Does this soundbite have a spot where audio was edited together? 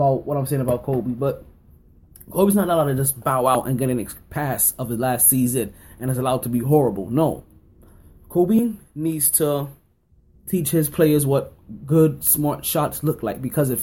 no; 0 cuts

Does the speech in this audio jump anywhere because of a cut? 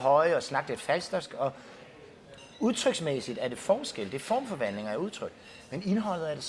no; 0 cuts

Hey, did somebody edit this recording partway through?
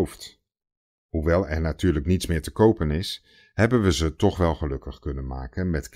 no; 0 cuts

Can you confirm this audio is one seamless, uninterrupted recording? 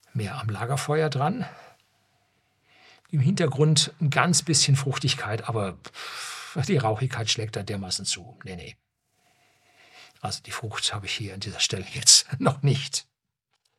yes; 0 cuts

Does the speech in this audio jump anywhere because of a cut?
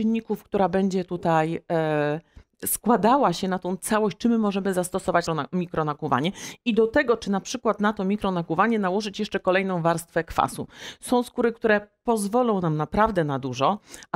yes; 1 cut; at 5.3 s

